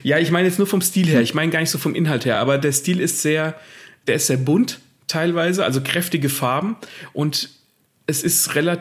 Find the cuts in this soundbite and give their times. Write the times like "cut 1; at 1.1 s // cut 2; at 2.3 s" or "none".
none